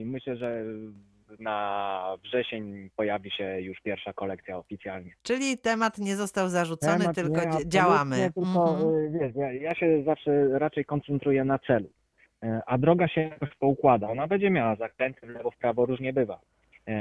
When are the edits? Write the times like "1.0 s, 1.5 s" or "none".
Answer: 5.2 s